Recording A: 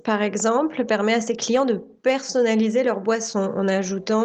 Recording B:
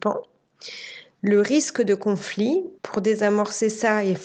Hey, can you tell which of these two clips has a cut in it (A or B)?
B